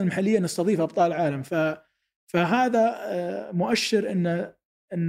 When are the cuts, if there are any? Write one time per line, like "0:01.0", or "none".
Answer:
none

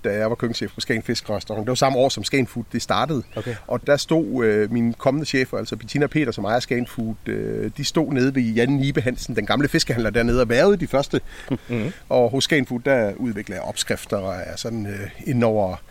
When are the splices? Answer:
0:03.8
0:11.6

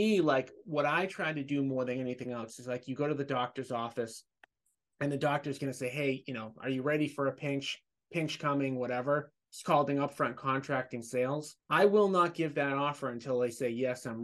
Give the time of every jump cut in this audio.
0:09.5
0:11.6

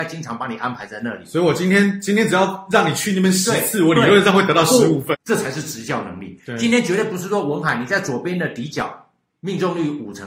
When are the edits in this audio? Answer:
0:05.1

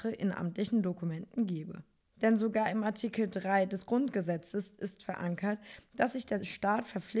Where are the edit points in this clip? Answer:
none

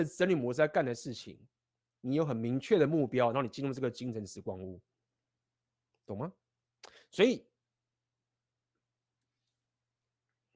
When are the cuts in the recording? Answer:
none

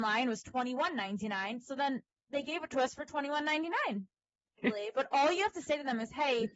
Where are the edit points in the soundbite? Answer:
0:04.6

